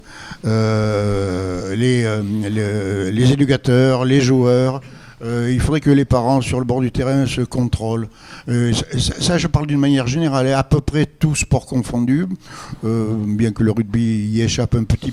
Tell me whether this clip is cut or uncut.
uncut